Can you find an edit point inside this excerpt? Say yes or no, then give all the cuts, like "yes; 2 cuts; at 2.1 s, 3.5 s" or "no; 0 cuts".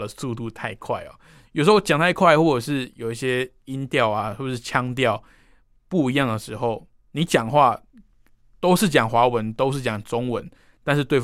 yes; 1 cut; at 1.5 s